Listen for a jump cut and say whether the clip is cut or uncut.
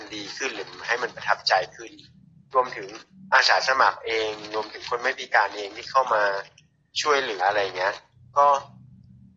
cut